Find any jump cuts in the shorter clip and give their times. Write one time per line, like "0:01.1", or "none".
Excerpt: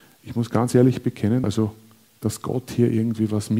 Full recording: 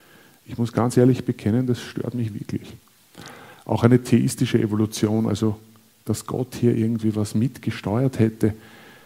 0:01.4

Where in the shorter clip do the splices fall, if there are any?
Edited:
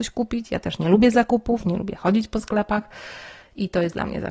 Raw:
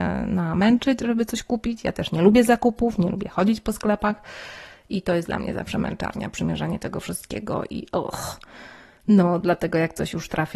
none

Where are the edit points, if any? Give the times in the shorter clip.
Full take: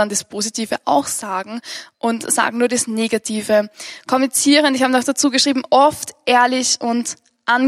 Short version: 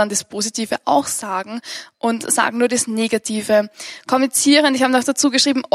none

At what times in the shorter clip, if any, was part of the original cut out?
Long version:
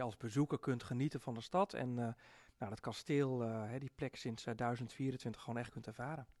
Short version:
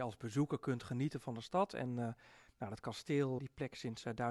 0:03.4

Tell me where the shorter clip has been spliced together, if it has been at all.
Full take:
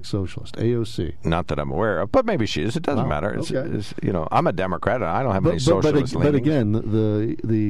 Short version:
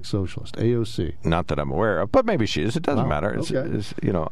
none

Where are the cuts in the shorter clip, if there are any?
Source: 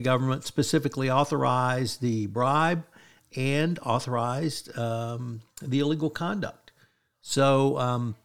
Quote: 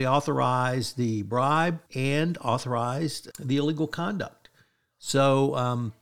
0:01.9
0:03.3

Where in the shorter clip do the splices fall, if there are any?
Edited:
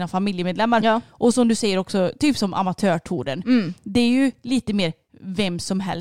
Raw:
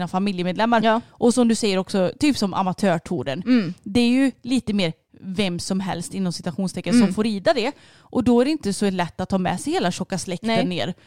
none

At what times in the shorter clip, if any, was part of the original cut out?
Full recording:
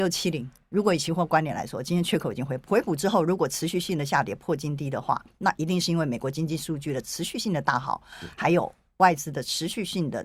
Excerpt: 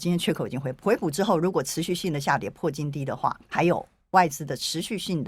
0:03.5

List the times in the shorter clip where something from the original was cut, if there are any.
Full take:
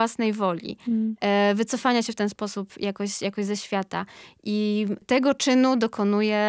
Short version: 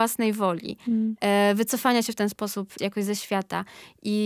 0:02.8

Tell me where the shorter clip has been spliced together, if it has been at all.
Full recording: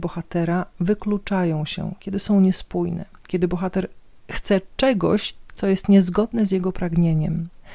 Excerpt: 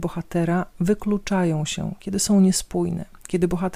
none

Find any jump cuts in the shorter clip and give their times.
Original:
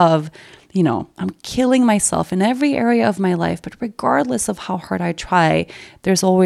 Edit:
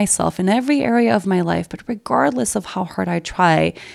none

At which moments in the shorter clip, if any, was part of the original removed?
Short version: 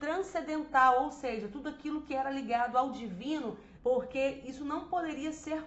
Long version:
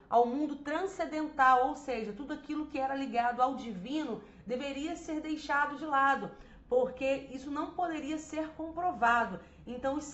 0:03.8

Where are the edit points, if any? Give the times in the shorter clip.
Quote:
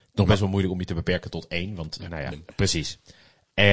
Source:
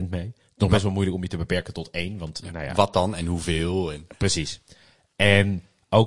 0:02.3

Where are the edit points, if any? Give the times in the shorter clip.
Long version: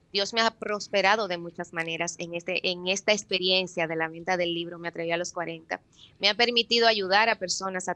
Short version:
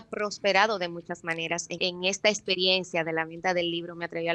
0:01.8

